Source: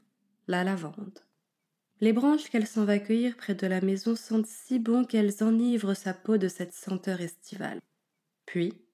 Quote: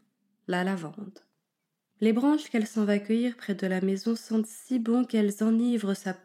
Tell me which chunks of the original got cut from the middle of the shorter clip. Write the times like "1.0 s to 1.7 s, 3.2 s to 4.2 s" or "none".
none